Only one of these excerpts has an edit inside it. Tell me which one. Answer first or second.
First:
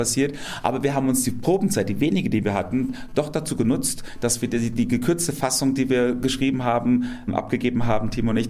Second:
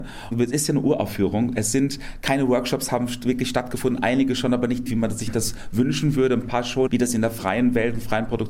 second